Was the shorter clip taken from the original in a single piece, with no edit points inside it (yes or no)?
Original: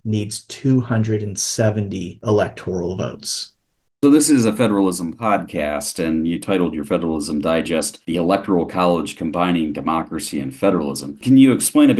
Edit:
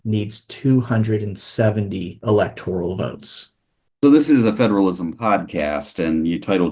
yes